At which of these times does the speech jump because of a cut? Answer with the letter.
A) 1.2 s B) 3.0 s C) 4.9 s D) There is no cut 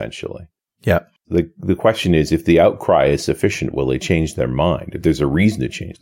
A